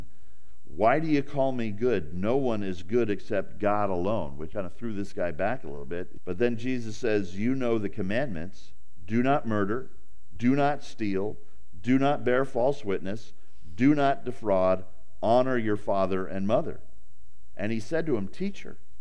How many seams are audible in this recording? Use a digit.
3